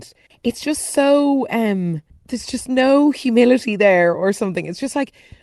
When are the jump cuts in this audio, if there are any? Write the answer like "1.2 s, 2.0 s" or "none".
none